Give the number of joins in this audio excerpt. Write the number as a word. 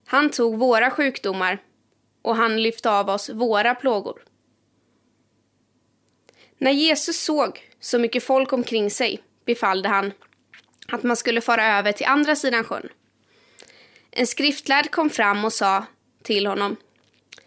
zero